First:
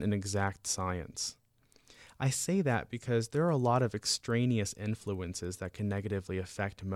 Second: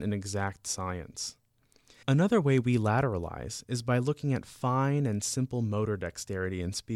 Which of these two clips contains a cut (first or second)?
second